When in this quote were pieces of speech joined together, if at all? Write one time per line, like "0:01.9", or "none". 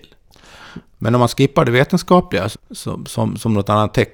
0:02.5